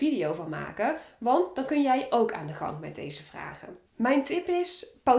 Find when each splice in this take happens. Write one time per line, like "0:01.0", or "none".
0:03.9